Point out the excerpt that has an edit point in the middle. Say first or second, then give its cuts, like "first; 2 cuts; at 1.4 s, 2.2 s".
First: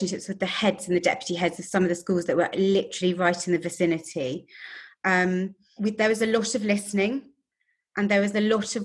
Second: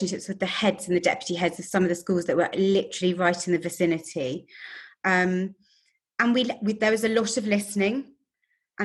first; 1 cut; at 5.8 s